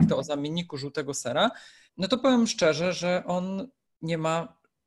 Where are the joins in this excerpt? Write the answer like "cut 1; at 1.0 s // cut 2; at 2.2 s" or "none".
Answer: cut 1; at 1.9 s

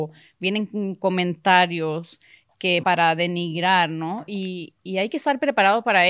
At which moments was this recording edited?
cut 1; at 2.8 s

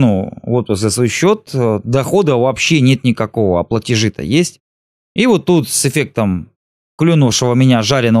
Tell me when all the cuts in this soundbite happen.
none

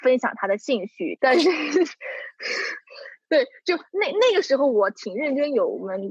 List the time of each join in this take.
cut 1; at 1.2 s

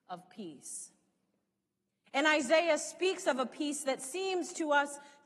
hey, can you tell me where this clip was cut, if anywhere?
none

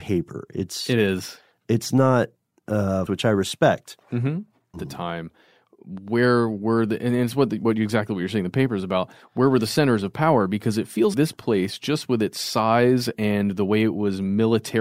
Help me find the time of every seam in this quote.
cut 1; at 3.1 s // cut 2; at 4.7 s // cut 3; at 11.1 s

